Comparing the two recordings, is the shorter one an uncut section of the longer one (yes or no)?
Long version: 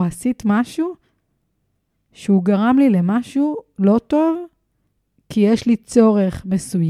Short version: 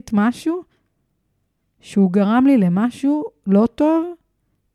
yes